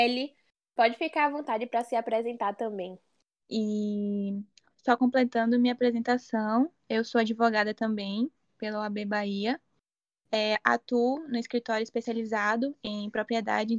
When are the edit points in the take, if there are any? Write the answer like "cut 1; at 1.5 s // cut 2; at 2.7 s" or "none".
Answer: cut 1; at 3.4 s